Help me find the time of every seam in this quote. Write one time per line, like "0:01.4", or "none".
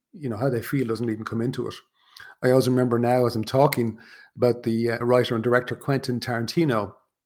0:05.0